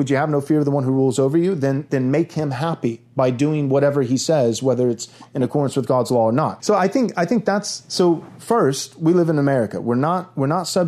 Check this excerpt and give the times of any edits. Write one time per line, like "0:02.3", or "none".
0:06.6